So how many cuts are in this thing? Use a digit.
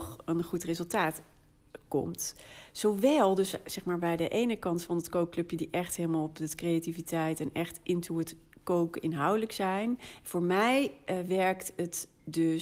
0